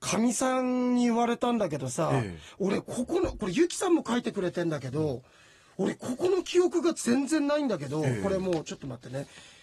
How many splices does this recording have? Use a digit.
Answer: 0